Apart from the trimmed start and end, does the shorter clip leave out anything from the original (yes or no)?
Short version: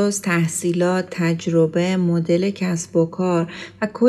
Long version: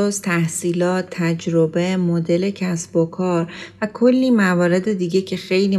no